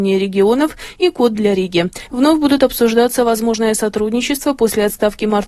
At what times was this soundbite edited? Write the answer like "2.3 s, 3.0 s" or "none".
2.1 s